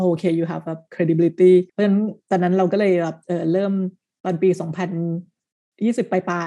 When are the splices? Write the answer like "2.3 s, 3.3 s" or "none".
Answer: 1.7 s

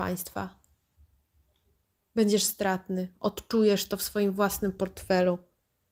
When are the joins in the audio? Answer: none

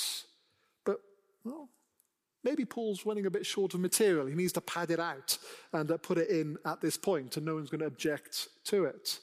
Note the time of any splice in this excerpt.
none

